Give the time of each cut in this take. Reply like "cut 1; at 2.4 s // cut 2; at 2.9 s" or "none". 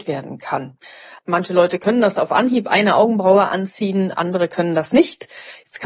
cut 1; at 1.2 s